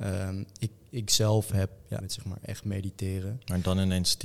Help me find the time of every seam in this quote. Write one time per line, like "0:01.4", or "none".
0:02.0